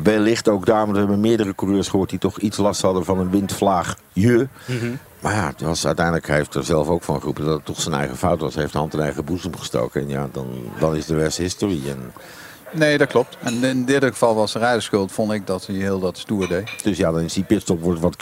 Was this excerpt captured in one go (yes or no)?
no